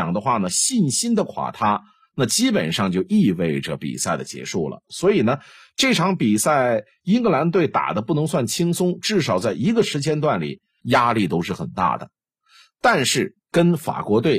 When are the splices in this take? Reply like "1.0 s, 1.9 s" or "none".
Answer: 10.8 s